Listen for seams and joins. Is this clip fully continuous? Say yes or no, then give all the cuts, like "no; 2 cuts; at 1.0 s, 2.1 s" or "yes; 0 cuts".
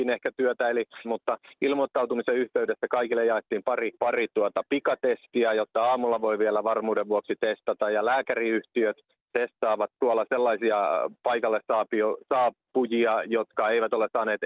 no; 3 cuts; at 1.0 s, 4.0 s, 9.9 s